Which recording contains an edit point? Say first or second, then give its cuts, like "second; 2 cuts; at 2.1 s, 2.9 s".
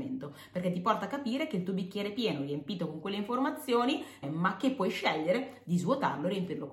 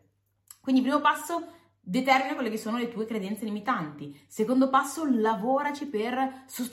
first; 1 cut; at 4.2 s